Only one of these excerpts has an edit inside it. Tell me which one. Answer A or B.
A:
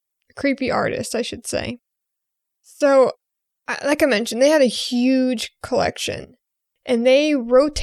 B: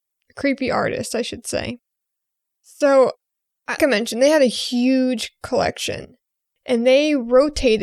B